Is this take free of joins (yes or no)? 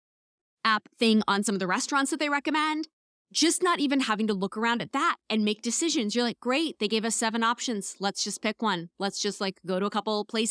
yes